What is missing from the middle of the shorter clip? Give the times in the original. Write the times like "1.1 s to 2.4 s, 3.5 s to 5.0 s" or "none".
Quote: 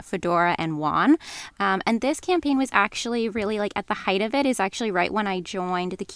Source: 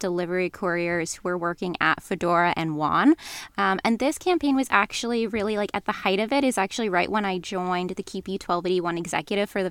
none